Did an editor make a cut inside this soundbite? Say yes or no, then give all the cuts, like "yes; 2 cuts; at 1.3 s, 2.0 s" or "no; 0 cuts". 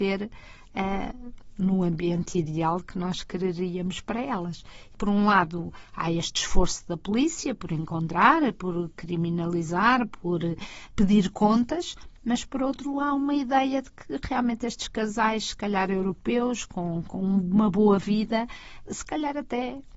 no; 0 cuts